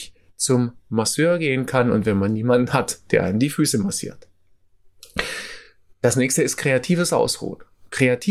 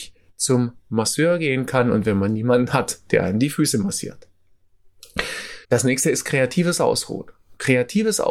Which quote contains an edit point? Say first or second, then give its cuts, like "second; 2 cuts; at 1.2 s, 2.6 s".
second; 1 cut; at 5.6 s